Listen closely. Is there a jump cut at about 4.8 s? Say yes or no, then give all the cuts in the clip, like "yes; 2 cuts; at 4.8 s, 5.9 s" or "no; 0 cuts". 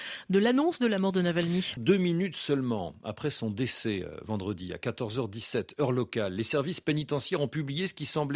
no; 1 cut; at 1.8 s